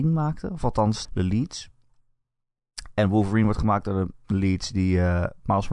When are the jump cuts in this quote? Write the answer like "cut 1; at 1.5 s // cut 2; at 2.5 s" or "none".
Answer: cut 1; at 1.0 s